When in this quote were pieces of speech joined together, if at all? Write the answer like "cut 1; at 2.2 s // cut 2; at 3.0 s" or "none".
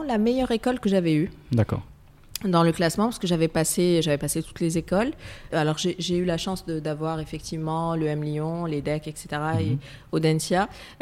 cut 1; at 5.5 s